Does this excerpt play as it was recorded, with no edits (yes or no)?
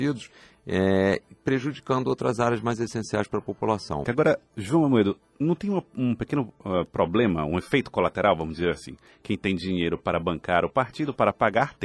no